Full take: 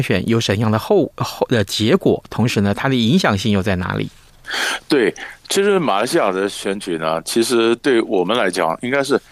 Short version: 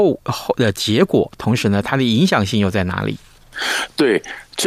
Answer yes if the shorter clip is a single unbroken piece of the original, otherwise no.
yes